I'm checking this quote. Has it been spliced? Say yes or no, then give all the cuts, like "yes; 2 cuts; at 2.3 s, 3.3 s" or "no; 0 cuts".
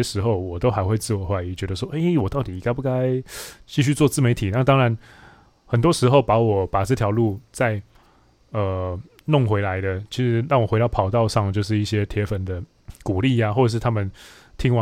no; 0 cuts